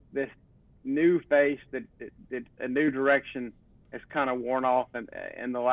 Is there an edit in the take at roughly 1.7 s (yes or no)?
no